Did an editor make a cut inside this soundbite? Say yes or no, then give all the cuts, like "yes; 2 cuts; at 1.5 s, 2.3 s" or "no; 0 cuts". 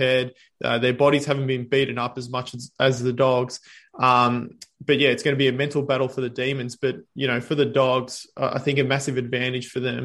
no; 0 cuts